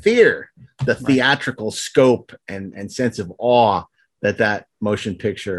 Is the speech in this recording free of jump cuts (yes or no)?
yes